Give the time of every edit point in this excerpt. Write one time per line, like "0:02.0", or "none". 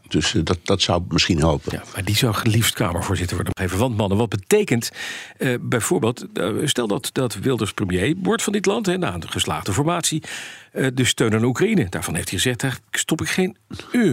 0:07.1